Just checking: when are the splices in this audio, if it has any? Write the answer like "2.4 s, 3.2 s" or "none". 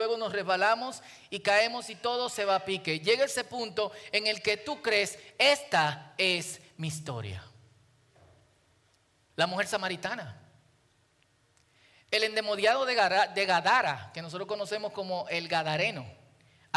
9.3 s